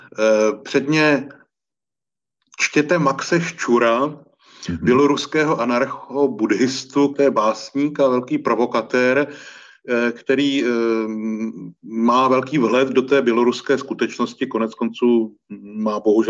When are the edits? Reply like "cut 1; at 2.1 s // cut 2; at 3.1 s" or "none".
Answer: cut 1; at 7.1 s